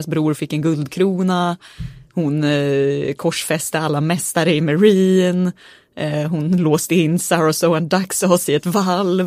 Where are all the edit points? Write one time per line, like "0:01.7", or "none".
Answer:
none